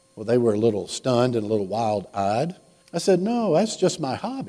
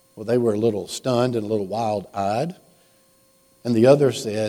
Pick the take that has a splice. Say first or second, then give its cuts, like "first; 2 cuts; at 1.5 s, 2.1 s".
first; 1 cut; at 2.8 s